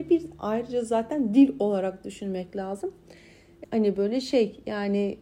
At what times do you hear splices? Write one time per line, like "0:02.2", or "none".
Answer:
0:03.6

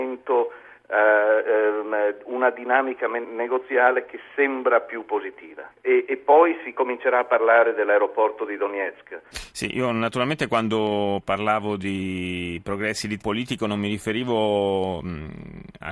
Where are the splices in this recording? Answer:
0:05.7
0:09.3
0:13.2

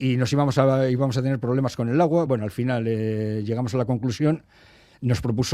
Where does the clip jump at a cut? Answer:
none

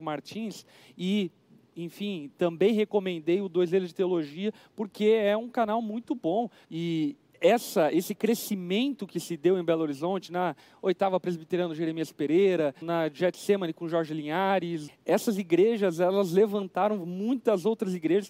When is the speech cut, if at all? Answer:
0:06.6
0:12.8
0:14.9

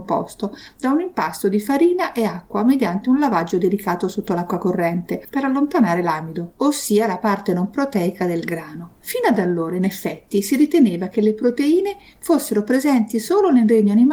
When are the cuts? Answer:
none

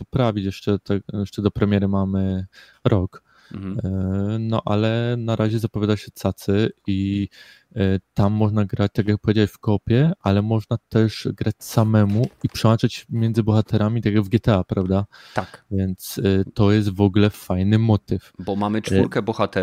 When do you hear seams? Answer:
none

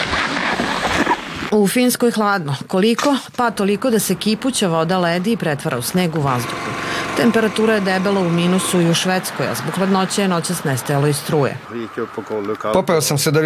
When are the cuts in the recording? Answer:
none

